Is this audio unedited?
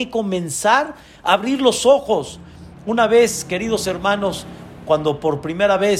yes; 0 cuts

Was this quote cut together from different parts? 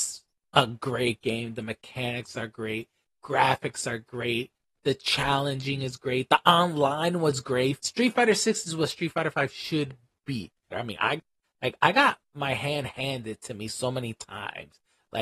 yes; 2 cuts; at 7.8 s, 10.7 s

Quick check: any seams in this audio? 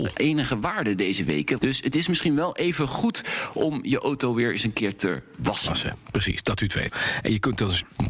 yes; 2 cuts; at 1.6 s, 6.9 s

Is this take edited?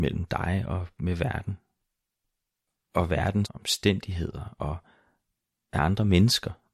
yes; 1 cut; at 3.5 s

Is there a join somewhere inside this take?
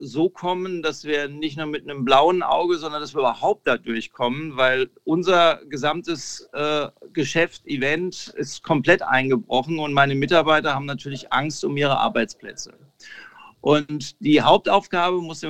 no; 0 cuts

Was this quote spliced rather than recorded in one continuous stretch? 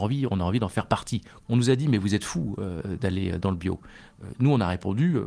yes; 1 cut; at 1.4 s

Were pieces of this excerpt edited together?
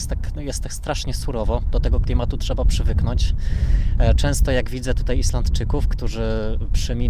no; 0 cuts

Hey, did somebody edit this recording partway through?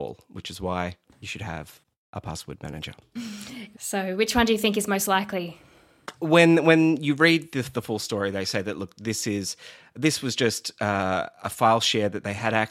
yes; 2 cuts; at 3.7 s, 6.1 s

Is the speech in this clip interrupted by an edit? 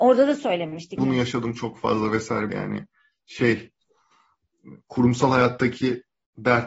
yes; 2 cuts; at 1.0 s, 2.5 s

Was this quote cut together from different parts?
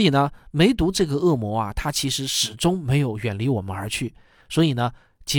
yes; 1 cut; at 4.4 s

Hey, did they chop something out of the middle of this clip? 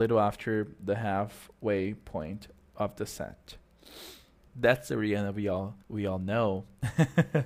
yes; 2 cuts; at 4.5 s, 5.8 s

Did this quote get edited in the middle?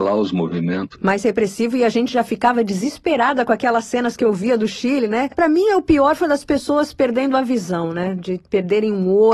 no; 0 cuts

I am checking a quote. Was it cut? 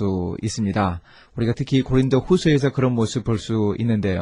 no; 0 cuts

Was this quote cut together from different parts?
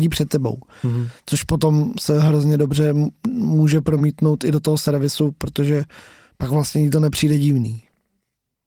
no; 0 cuts

